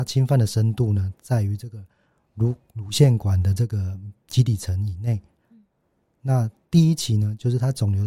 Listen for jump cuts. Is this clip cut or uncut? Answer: uncut